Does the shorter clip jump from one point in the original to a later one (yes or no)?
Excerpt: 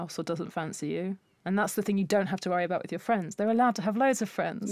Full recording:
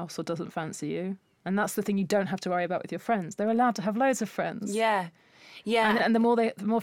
no